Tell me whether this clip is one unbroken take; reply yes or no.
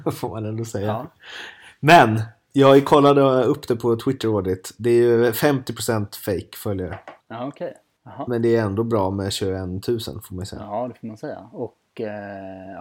yes